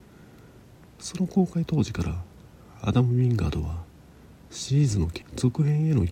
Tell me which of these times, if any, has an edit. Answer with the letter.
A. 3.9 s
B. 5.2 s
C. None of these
B